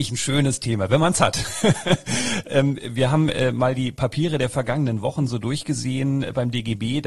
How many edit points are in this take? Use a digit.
0